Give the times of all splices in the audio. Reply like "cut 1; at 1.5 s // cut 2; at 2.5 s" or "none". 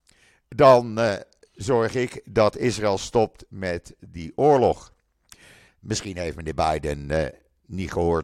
cut 1; at 5.7 s